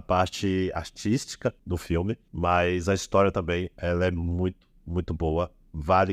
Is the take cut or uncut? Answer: uncut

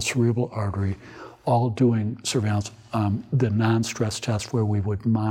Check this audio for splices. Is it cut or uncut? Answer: uncut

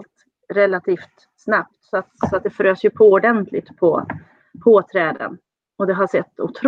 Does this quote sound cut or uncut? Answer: uncut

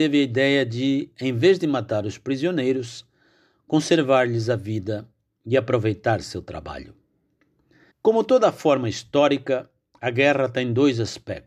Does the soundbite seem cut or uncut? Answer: cut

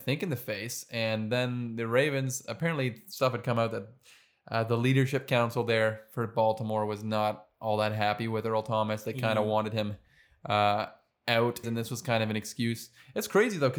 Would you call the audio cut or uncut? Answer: cut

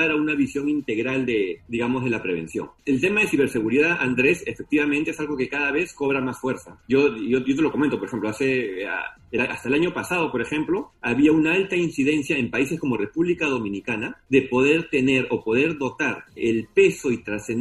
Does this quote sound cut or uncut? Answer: uncut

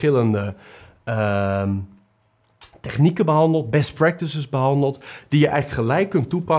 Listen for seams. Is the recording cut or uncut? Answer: uncut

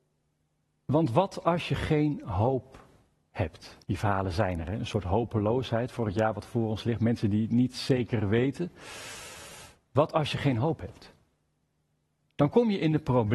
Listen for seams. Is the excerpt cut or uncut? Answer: cut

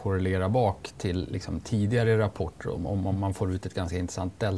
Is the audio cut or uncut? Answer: uncut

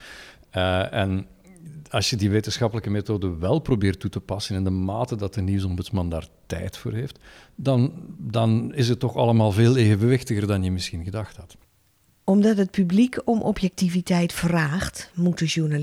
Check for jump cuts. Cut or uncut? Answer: uncut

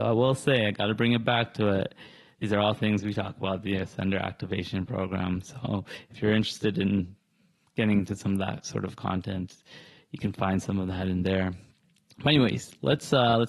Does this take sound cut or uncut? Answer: uncut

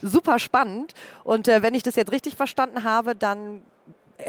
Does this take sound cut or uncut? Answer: uncut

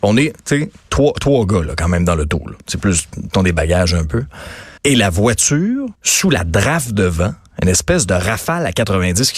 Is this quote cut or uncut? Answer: cut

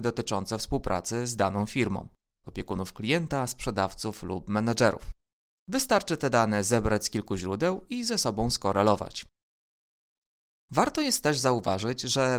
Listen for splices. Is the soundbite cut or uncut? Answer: cut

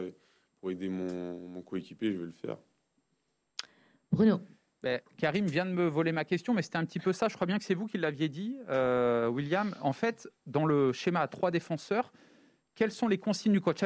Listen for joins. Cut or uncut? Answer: uncut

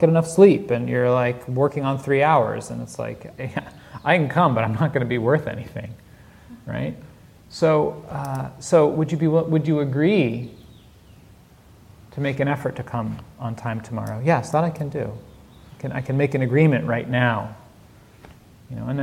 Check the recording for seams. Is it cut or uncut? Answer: uncut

